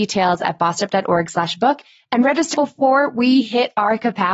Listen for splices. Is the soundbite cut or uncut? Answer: cut